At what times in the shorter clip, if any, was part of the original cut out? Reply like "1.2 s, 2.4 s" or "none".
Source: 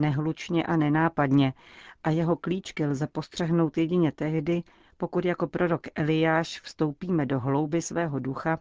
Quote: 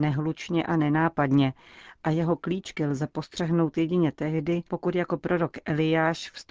4.7 s